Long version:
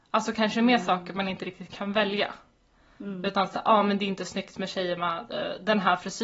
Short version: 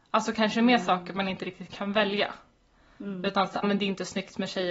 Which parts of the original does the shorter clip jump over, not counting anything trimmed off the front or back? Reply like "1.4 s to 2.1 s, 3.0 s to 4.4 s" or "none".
3.6 s to 3.8 s